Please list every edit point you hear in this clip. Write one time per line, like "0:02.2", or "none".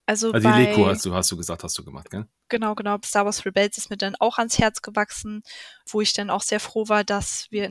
0:03.0